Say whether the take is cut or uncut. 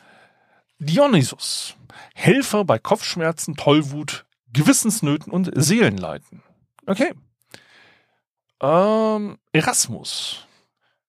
uncut